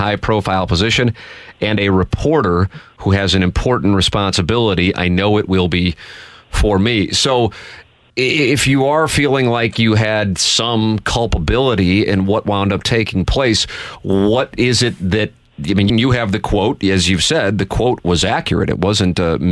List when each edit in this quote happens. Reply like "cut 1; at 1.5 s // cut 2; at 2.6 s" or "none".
cut 1; at 15.9 s